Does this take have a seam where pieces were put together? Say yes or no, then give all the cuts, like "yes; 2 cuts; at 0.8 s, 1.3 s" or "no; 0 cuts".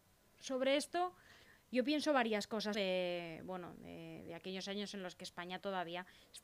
yes; 1 cut; at 2.7 s